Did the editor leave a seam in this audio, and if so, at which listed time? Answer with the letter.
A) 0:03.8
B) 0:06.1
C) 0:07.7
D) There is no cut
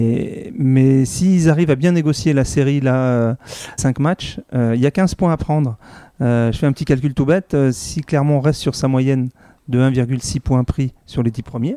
A